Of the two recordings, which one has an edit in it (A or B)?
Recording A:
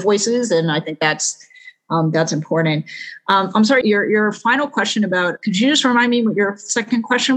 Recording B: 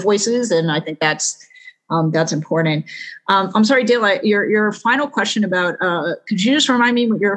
A